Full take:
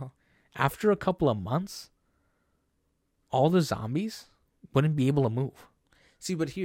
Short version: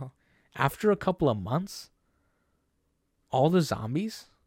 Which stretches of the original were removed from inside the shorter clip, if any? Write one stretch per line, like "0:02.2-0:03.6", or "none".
none